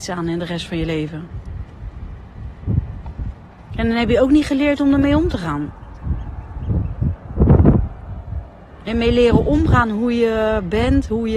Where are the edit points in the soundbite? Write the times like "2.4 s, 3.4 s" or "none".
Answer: 3.7 s